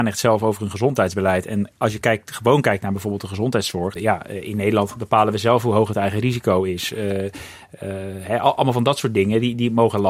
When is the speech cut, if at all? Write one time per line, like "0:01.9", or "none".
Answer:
0:04.0